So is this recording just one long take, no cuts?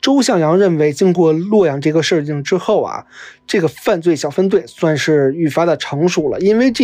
yes; 0 cuts

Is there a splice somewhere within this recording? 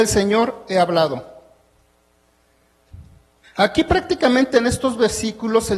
yes; 1 cut; at 3.4 s

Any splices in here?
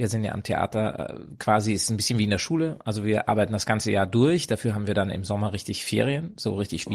no; 0 cuts

